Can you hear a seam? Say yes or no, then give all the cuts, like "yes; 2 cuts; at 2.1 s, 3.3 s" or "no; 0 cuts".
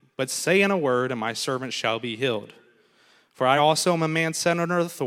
no; 0 cuts